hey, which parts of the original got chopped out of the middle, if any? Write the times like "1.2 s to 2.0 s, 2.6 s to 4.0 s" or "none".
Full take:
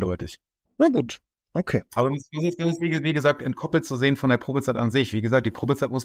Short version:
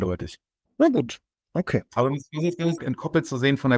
2.8 s to 3.4 s